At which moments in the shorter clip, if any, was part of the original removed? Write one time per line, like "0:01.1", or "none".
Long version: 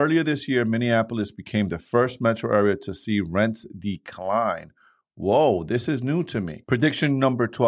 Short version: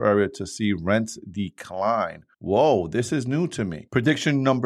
0:02.3